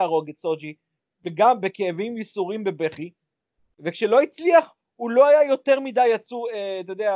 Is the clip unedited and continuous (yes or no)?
yes